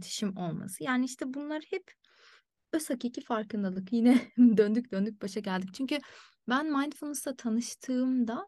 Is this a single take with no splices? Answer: yes; 0 cuts

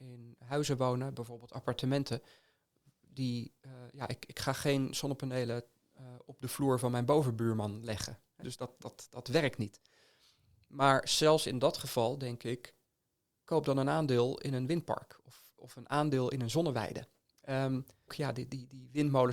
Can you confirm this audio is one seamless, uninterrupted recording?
no; 2 cuts; at 8.4 s, 18.1 s

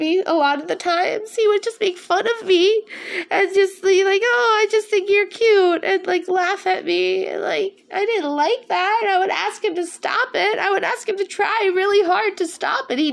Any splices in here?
no; 0 cuts

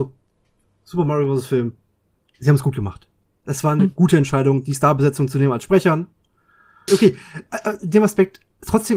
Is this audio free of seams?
no; 1 cut; at 6.9 s

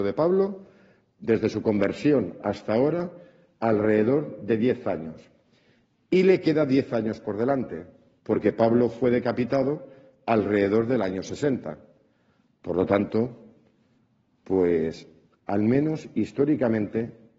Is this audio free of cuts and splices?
yes; 0 cuts

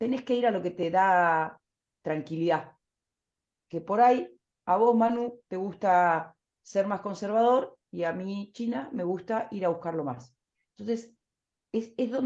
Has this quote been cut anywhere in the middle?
no; 0 cuts

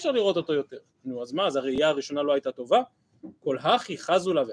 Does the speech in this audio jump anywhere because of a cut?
no; 0 cuts

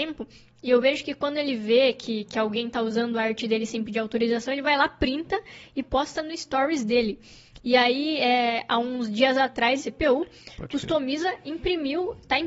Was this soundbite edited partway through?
yes; 1 cut; at 9.8 s

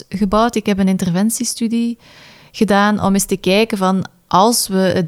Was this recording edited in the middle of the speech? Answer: no; 0 cuts

